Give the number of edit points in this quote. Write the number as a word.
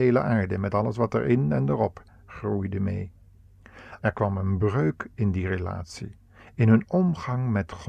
one